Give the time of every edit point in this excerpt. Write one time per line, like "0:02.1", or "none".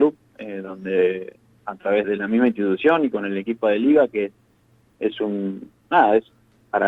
0:02.0

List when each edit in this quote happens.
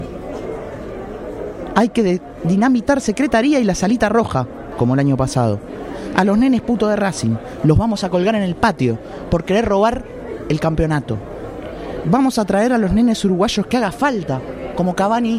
0:04.7
0:12.0

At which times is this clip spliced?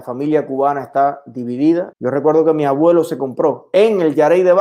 0:01.9

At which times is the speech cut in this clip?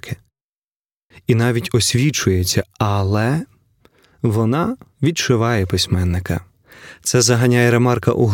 0:01.1

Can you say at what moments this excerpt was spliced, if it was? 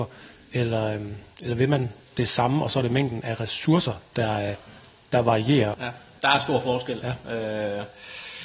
0:05.7

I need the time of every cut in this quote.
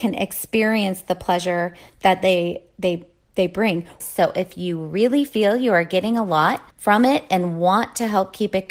0:04.0
0:06.7

